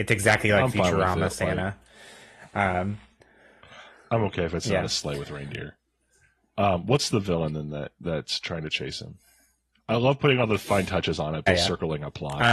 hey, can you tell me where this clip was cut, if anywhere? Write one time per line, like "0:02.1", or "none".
0:11.5